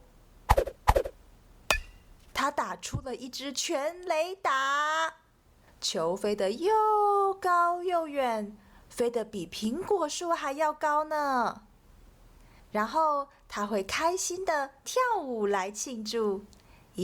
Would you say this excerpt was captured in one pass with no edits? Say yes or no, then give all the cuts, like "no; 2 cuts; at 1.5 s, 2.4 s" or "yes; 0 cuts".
no; 1 cut; at 2.3 s